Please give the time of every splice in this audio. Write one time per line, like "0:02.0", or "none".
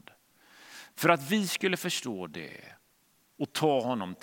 0:00.9